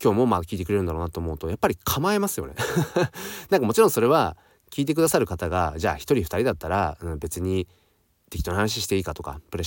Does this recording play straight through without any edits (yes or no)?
yes